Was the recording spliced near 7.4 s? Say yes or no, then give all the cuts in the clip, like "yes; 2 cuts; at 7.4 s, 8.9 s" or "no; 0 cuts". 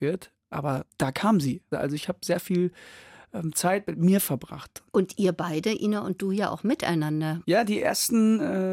yes; 3 cuts; at 1.7 s, 4.9 s, 7.4 s